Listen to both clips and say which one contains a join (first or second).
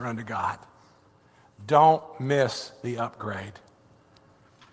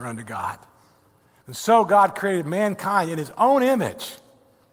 second